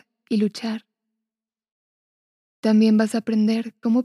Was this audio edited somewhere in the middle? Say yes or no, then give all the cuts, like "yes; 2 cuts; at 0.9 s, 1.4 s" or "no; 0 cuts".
no; 0 cuts